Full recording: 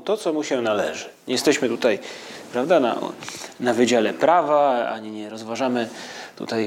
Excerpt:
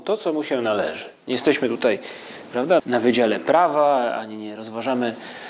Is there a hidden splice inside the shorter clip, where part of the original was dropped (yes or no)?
yes